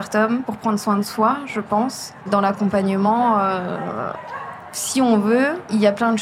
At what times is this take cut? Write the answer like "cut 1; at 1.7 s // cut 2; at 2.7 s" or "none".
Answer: cut 1; at 2.3 s